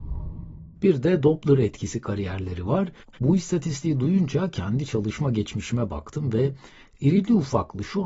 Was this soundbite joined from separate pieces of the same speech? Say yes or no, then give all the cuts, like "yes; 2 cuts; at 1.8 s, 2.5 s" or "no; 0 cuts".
yes; 1 cut; at 3.1 s